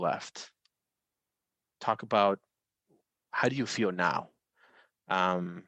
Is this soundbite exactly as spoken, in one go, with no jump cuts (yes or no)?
yes